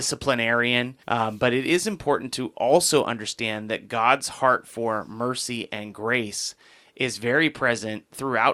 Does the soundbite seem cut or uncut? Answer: cut